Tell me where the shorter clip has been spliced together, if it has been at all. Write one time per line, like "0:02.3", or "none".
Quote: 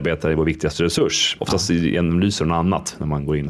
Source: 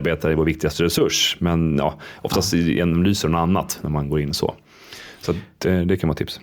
0:01.4